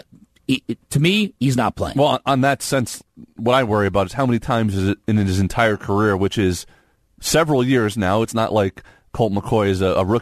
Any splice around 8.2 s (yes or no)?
no